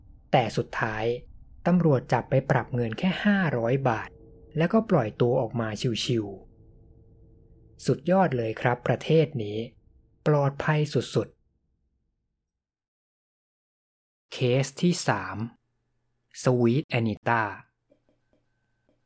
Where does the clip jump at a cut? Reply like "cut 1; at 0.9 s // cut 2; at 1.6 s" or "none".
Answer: none